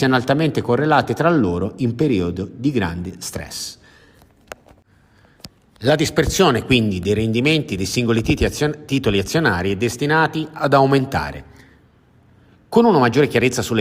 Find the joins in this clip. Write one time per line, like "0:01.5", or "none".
none